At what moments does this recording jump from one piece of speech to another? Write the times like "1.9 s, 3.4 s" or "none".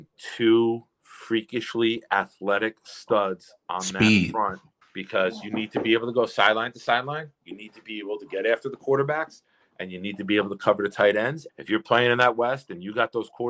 4.8 s, 11.5 s